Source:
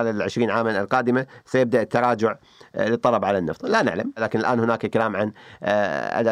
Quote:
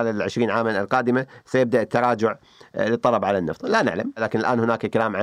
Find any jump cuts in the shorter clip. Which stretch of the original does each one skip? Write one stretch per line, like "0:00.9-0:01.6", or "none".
none